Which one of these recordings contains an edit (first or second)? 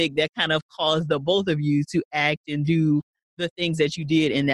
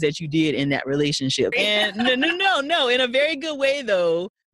second